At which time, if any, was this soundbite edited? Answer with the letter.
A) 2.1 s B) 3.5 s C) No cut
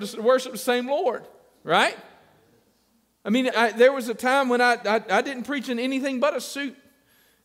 B